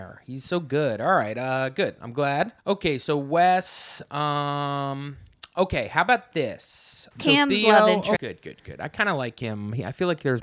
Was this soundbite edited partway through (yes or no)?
yes